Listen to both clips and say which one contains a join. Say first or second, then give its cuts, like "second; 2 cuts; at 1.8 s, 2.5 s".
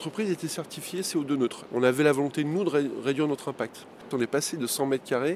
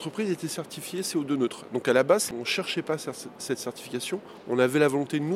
first; 2 cuts; at 1.7 s, 4.1 s